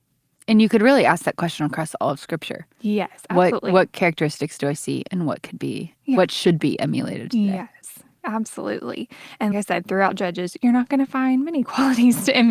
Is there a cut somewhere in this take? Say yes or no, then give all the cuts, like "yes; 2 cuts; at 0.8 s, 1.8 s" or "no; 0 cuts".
yes; 1 cut; at 9.5 s